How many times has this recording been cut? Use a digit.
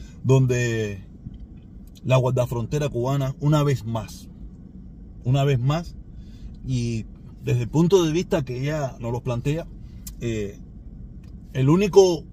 1